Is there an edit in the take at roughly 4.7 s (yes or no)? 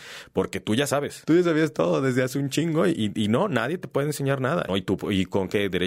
yes